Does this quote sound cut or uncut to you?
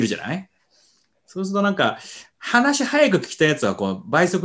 uncut